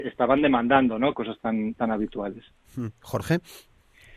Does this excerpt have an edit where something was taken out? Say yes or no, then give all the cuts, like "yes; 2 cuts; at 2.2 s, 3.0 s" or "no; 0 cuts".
yes; 1 cut; at 1.1 s